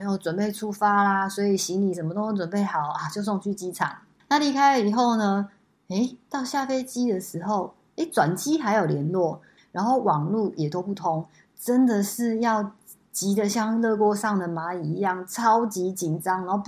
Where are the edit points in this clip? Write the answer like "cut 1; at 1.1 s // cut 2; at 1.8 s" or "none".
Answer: cut 1; at 4.2 s // cut 2; at 9.6 s